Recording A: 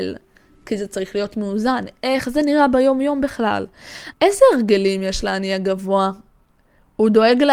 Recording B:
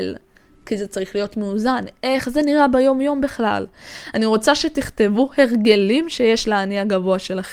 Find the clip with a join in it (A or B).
A